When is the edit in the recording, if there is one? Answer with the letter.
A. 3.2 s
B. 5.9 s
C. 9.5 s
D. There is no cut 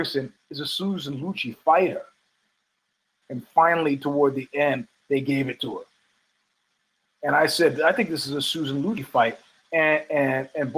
A